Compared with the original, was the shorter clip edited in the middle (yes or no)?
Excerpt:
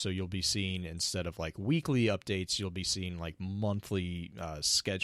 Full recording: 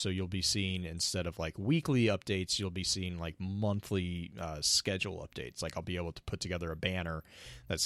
no